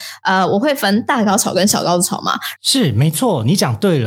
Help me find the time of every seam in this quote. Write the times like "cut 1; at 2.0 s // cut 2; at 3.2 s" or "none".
cut 1; at 2.6 s